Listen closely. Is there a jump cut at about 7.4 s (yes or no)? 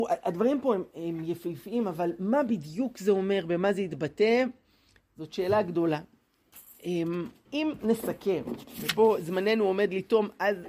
yes